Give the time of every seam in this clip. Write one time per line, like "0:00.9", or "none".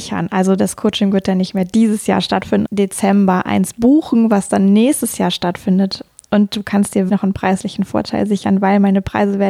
0:02.6
0:07.1